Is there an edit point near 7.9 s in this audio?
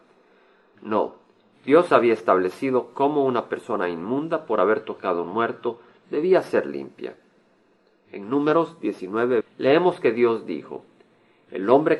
no; 1 cut; at 9.4 s

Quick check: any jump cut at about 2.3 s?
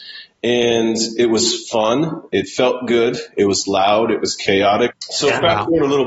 no; 1 cut; at 4.9 s

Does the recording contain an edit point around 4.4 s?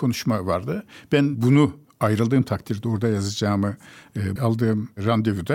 yes; 1 cut; at 4.4 s

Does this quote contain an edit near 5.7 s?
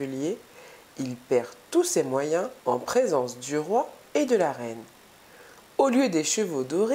no; 1 cut; at 2.6 s

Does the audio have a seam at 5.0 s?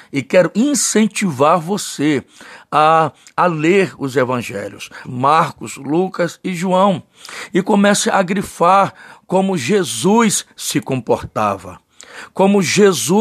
yes; 1 cut; at 5.0 s

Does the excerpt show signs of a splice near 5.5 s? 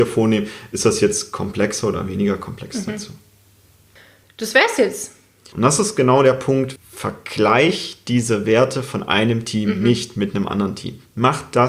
yes; 2 cuts; at 5.5 s, 6.8 s

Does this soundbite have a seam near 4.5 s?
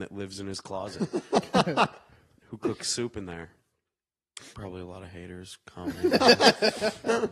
yes; 1 cut; at 4.5 s

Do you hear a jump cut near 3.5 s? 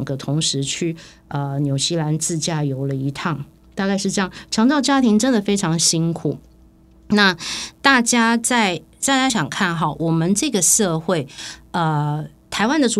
no; 1 cut; at 9.3 s

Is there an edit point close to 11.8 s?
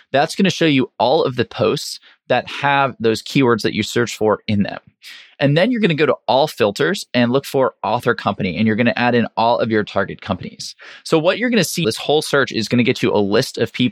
yes; 1 cut; at 11.8 s

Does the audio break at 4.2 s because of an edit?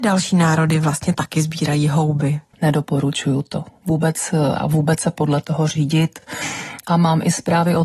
no; 2 cuts; at 2.5 s, 6.8 s

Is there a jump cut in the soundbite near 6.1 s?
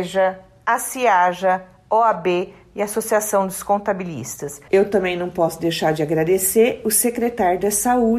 no; 1 cut; at 4.7 s

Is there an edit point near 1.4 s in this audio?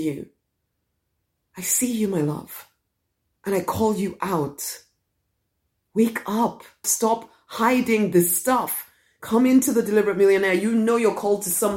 no; 1 cut; at 6.8 s

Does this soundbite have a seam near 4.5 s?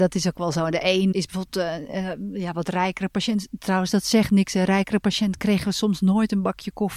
no; 1 cut; at 1.1 s

